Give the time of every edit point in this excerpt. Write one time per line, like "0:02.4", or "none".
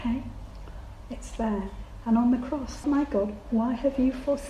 0:02.8